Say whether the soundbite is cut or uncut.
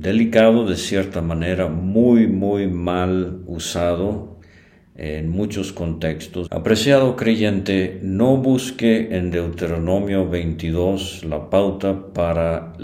cut